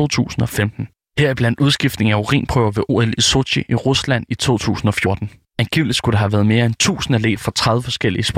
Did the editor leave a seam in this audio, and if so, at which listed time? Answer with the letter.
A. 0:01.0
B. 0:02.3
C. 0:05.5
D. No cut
C